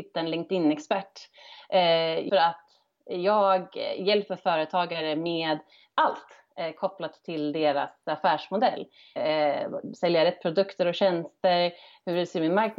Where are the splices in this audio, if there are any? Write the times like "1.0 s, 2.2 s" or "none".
2.3 s, 9.2 s